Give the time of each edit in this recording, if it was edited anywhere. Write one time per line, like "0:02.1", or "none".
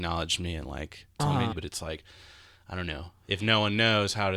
0:01.5